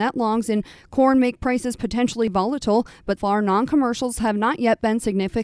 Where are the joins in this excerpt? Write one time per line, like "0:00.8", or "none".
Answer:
0:03.2